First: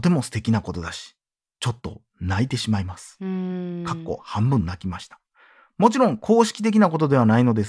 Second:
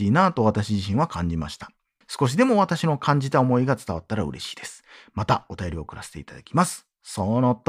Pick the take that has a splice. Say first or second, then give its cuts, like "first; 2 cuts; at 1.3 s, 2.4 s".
second; 1 cut; at 2.0 s